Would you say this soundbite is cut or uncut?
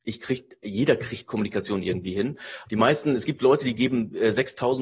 cut